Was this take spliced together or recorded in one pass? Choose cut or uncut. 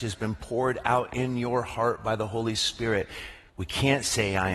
cut